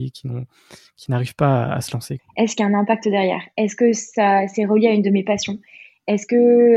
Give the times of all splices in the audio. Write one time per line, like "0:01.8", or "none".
0:02.2